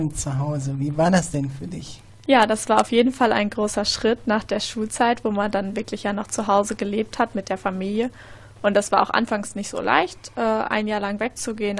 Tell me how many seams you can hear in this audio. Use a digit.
0